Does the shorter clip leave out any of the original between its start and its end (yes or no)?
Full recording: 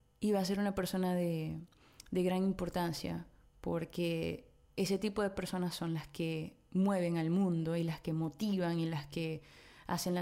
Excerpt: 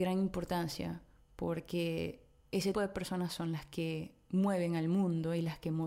yes